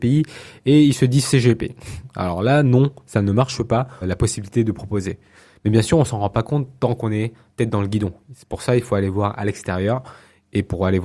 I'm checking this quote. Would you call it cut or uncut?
cut